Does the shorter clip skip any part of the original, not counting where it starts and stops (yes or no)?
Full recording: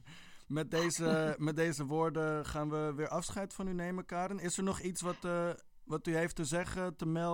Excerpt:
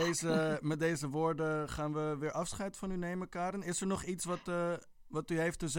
no